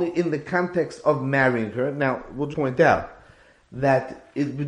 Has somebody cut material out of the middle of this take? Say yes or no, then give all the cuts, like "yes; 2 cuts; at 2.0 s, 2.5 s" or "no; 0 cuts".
yes; 1 cut; at 2.5 s